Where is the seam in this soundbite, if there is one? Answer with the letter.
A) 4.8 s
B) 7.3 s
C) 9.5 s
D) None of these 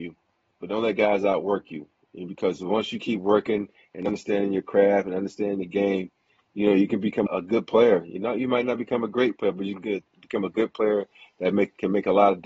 B